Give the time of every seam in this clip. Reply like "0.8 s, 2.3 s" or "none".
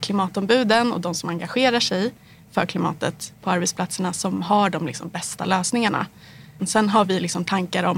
6.6 s